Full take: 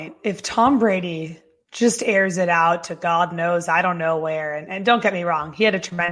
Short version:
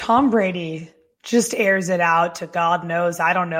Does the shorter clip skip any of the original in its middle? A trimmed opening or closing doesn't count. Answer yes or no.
no